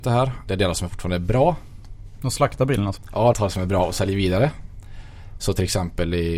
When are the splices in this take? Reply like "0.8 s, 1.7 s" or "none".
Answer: 3.3 s, 5.4 s